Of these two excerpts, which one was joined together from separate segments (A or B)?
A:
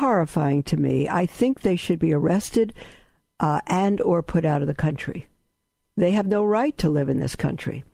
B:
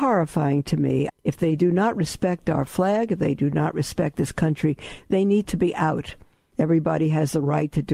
B